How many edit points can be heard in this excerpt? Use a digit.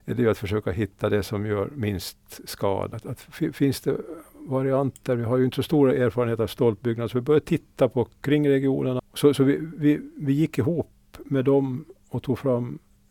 2